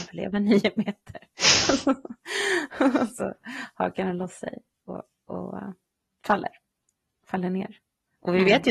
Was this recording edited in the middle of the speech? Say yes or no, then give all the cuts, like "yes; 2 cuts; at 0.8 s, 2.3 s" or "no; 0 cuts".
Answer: no; 0 cuts